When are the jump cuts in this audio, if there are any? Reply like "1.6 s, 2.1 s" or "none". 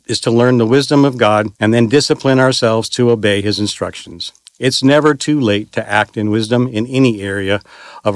1.6 s